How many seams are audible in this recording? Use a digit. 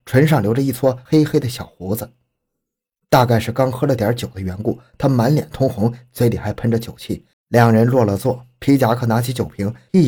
1